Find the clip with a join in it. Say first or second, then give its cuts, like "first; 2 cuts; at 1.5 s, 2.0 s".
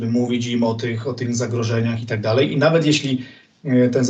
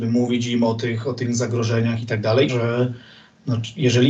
second; 1 cut; at 2.5 s